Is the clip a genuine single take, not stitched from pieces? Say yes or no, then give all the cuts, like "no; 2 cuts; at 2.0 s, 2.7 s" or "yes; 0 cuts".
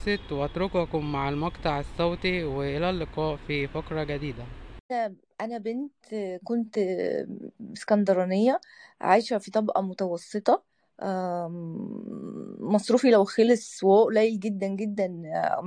yes; 0 cuts